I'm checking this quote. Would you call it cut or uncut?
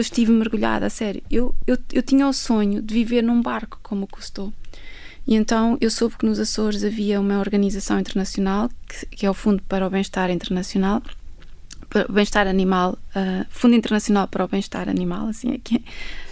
uncut